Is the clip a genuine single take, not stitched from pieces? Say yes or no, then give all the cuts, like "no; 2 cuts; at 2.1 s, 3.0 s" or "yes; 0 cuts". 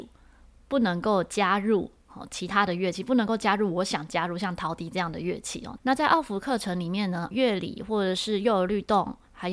no; 2 cuts; at 5.8 s, 7.3 s